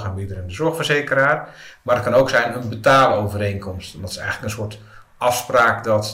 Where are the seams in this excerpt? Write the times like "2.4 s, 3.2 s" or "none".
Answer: none